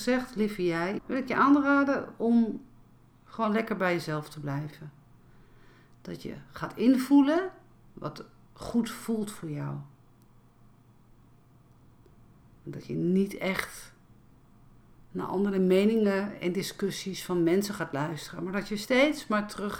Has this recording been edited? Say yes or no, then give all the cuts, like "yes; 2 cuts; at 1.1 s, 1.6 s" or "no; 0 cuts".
yes; 1 cut; at 1.0 s